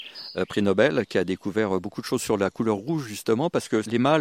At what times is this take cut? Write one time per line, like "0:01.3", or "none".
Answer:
none